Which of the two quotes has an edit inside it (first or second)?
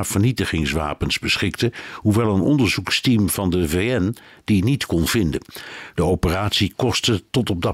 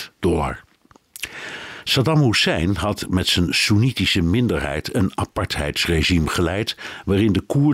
first